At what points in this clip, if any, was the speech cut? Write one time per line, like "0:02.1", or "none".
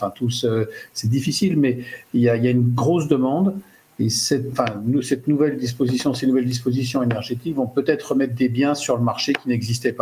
0:04.5

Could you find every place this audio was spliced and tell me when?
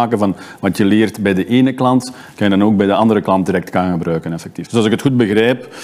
0:04.7

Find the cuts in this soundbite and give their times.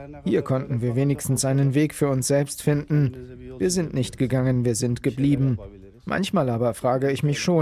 none

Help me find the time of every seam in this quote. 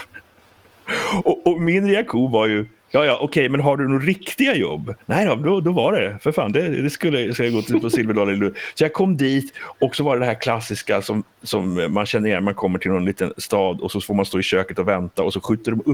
none

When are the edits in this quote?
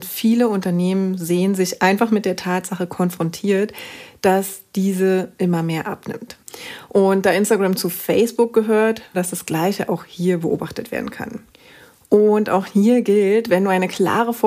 0:09.1

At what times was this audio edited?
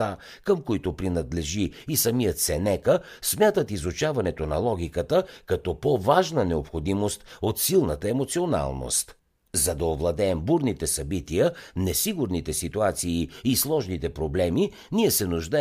0:09.5

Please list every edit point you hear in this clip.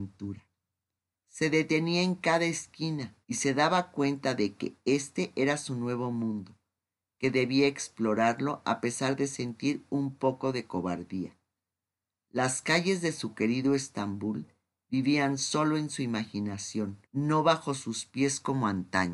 0:01.1
0:03.2
0:17.0

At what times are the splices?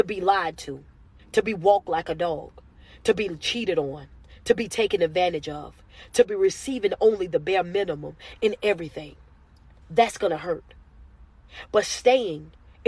0:01.2

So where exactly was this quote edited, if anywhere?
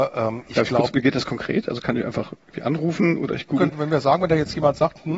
0:03.7

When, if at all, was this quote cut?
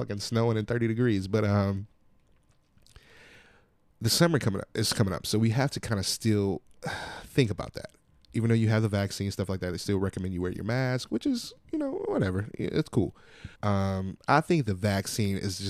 0:13.5

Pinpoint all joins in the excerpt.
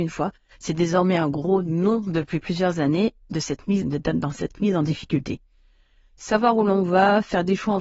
0:03.8

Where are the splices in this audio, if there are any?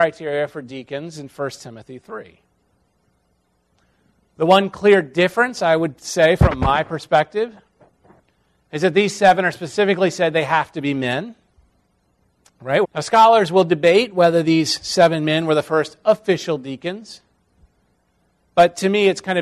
0:12.8

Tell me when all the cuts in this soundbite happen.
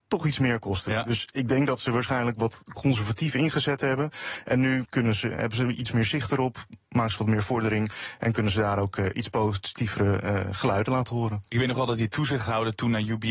0:04.9

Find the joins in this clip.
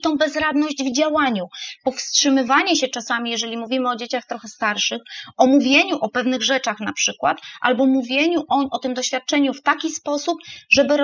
none

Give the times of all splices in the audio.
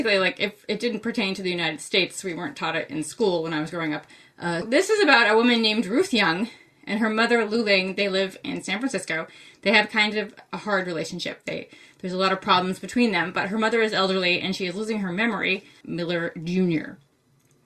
0:04.6
0:15.8

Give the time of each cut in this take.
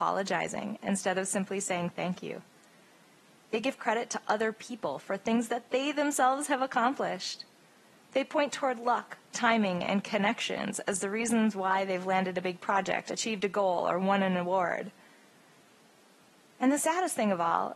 none

